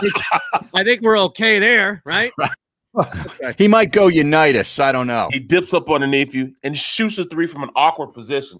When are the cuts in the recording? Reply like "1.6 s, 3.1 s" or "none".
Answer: 5.3 s